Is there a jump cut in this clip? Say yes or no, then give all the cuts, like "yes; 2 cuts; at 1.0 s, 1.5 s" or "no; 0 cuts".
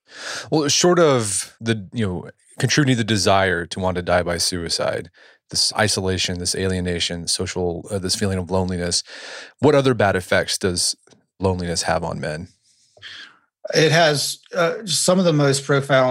no; 0 cuts